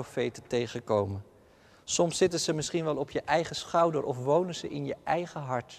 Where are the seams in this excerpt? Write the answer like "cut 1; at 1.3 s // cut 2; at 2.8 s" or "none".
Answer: none